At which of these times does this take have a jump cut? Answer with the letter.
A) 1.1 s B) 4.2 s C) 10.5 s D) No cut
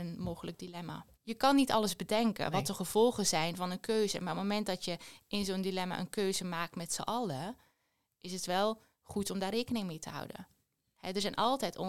A